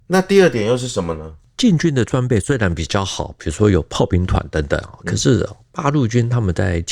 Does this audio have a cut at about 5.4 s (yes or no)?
no